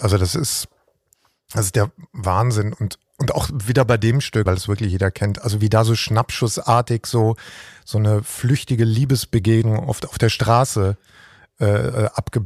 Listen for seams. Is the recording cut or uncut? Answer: cut